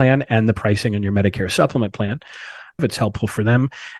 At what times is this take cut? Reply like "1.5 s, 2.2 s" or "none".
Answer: 2.8 s